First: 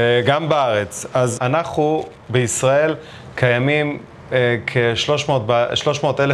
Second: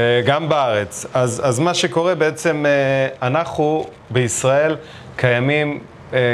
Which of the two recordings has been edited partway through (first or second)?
first